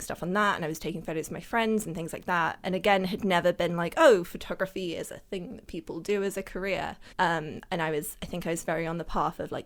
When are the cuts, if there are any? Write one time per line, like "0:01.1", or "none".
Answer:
0:07.1